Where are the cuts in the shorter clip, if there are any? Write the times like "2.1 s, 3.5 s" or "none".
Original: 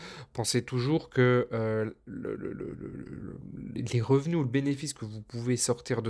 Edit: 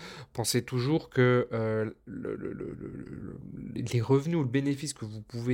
none